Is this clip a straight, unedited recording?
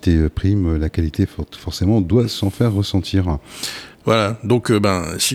no; 1 cut; at 3.9 s

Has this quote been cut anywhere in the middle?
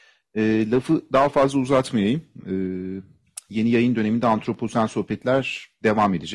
no; 0 cuts

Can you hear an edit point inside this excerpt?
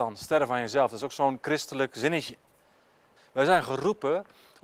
yes; 1 cut; at 3.2 s

